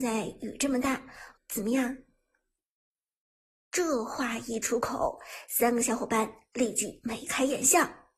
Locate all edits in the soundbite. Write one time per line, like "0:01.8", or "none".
0:01.3